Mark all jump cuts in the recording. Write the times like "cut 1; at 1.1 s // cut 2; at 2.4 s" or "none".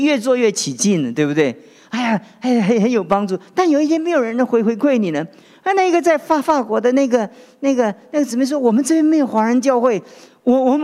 none